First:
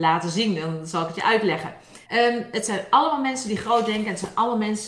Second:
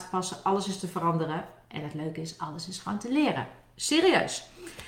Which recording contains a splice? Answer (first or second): first